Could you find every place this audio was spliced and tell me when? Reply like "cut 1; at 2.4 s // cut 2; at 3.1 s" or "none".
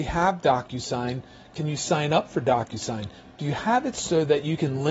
none